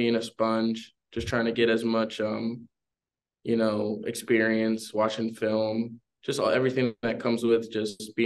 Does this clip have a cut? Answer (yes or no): no